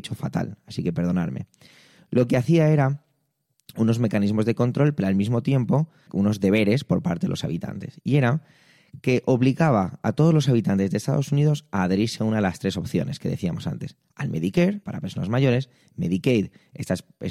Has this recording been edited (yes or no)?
yes